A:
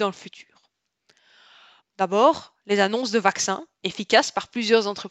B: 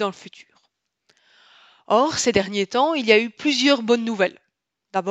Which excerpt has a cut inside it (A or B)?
A